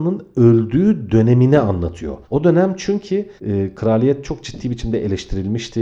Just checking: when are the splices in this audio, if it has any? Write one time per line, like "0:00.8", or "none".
0:02.2
0:03.4